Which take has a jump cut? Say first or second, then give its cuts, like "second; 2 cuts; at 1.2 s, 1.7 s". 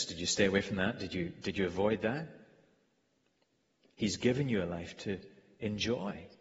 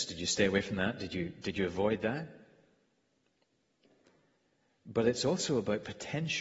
first; 1 cut; at 3.9 s